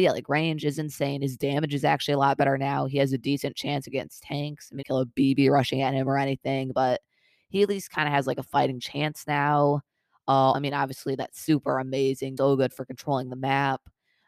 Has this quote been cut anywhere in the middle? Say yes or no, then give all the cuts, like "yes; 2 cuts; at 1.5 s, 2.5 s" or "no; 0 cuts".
yes; 3 cuts; at 4.8 s, 10.5 s, 12.4 s